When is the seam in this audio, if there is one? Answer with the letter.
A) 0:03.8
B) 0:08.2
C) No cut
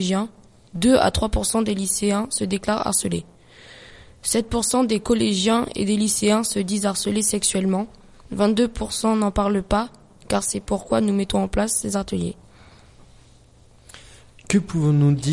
C